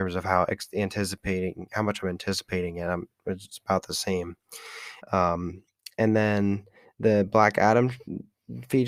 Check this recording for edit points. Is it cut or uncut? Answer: cut